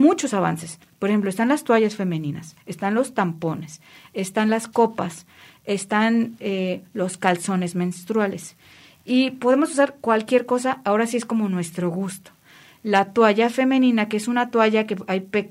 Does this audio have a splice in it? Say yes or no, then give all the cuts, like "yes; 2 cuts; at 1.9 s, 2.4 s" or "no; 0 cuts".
no; 0 cuts